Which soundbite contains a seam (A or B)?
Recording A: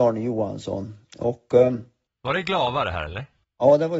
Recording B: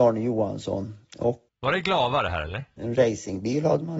B